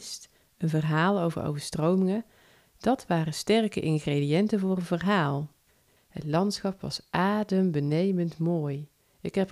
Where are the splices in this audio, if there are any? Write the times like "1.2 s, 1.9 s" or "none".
6.0 s